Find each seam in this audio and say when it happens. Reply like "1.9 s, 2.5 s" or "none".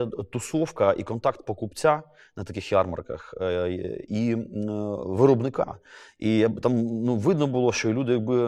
none